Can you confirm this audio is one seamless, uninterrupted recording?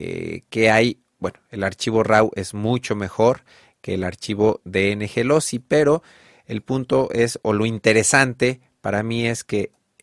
yes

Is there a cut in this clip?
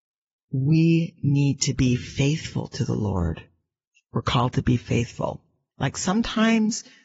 yes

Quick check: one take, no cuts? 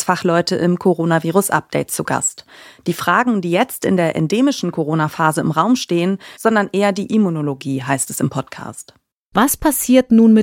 no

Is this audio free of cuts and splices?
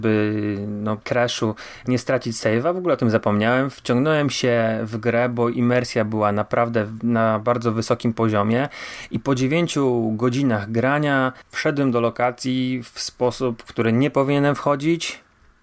no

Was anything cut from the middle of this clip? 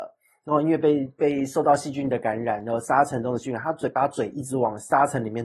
no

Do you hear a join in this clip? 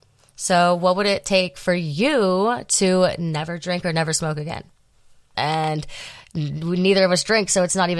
yes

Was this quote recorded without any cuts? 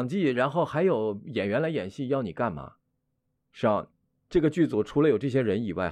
yes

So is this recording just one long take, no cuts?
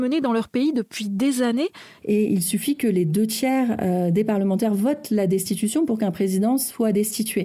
no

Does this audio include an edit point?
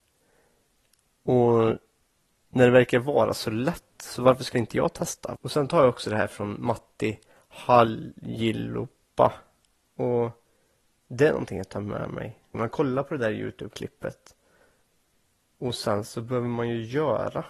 yes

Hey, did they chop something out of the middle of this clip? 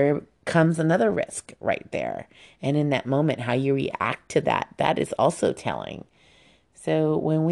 no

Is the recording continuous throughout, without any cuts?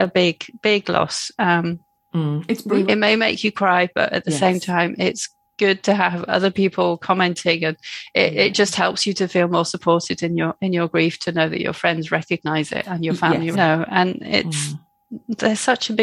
no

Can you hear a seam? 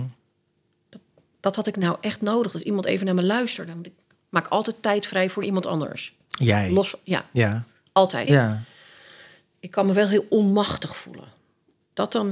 yes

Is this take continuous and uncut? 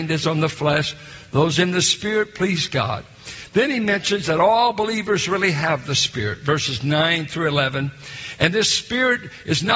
yes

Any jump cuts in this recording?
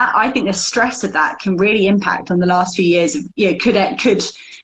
no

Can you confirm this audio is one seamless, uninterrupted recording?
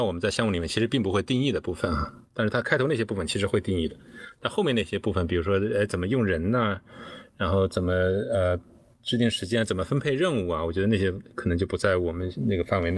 yes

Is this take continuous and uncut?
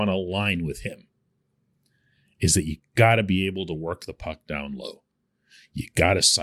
yes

